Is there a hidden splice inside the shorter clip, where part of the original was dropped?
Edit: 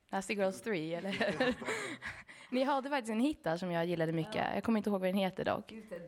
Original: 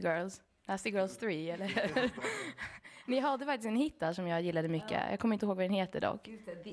no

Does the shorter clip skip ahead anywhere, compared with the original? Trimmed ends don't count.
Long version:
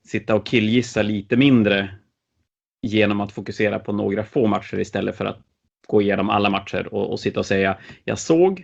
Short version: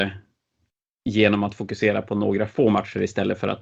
no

